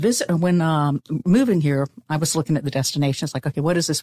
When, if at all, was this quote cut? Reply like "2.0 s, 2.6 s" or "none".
none